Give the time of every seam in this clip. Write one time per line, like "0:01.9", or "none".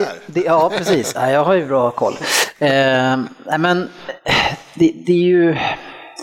none